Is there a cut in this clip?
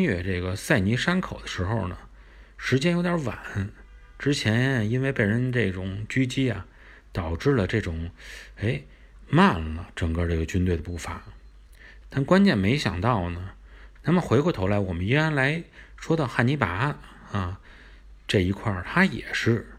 yes; 2 cuts; at 12.0 s, 14.0 s

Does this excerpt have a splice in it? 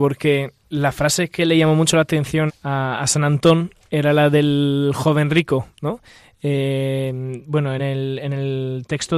yes; 2 cuts; at 2.5 s, 7.8 s

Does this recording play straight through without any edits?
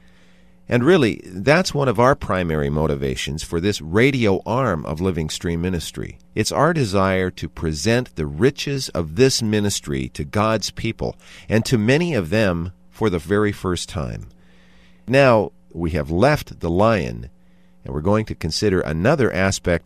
no; 1 cut; at 6.2 s

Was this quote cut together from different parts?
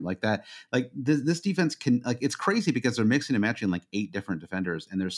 no; 0 cuts

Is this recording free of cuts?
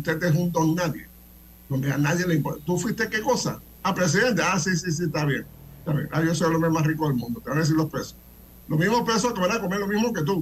yes; 0 cuts

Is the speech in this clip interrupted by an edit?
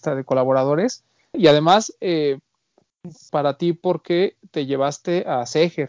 yes; 2 cuts; at 1.3 s, 3.3 s

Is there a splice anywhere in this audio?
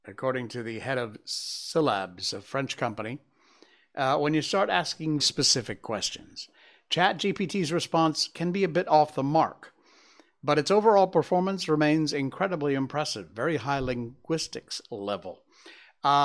yes; 1 cut; at 5.2 s

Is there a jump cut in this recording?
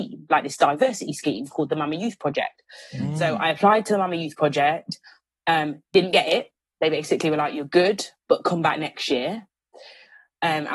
no; 0 cuts

